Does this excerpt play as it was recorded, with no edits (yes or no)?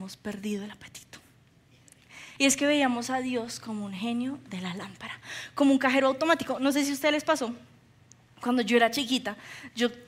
no